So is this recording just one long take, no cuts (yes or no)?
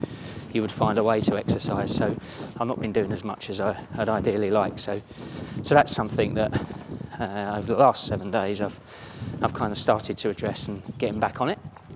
no